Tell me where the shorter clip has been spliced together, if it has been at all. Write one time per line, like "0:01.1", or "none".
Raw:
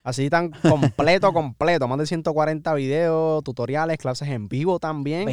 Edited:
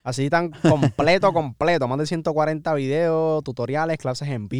none